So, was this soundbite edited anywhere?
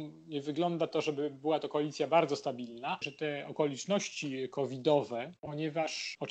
yes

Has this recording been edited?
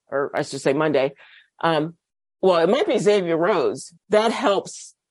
yes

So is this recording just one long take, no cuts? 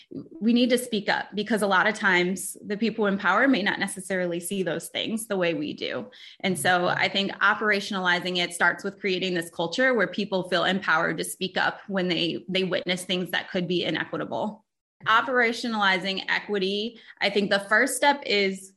no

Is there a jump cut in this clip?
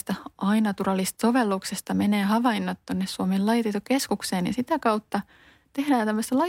no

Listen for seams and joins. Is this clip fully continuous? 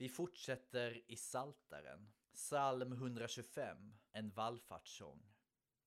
no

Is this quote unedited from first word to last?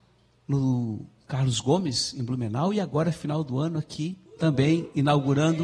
no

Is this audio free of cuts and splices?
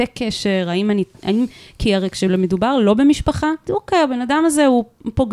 no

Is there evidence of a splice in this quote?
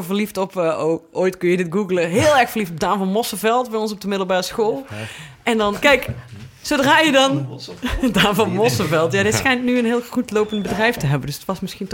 yes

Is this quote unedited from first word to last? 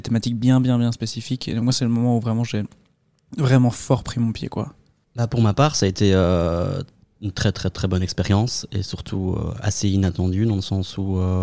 yes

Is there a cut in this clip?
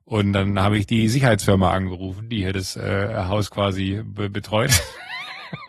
no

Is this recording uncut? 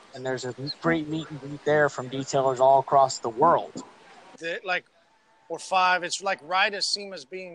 no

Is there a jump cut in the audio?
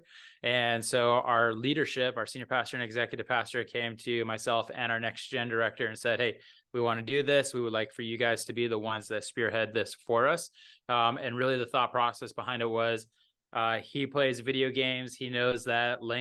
no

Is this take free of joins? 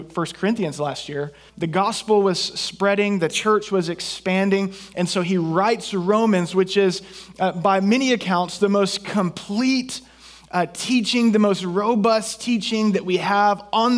no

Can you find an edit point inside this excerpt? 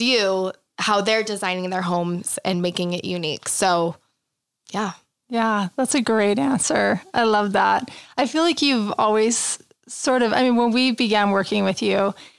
no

